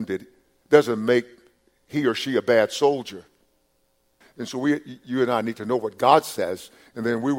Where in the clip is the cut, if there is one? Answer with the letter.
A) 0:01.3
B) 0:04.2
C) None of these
B